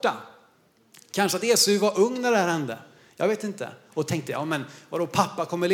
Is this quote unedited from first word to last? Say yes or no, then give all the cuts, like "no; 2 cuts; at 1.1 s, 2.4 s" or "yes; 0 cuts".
yes; 0 cuts